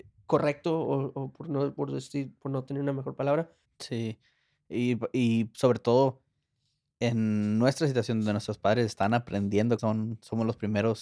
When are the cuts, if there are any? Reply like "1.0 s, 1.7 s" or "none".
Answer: 3.6 s, 9.8 s